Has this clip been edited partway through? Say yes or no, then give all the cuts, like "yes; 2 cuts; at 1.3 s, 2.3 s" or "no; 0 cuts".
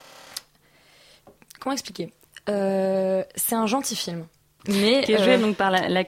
yes; 1 cut; at 4.6 s